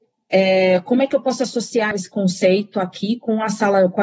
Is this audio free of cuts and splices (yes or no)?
no